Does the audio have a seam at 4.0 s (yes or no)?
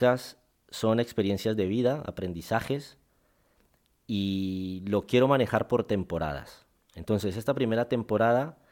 no